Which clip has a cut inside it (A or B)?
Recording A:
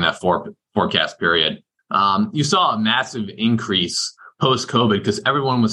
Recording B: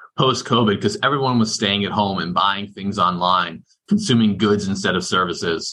A